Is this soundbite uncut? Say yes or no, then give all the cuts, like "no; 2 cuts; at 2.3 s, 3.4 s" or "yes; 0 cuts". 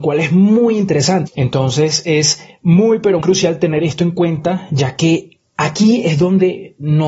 no; 2 cuts; at 1.3 s, 3.2 s